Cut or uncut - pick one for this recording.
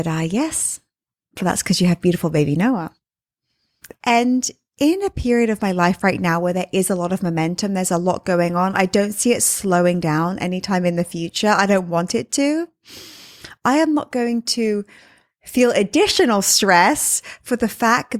cut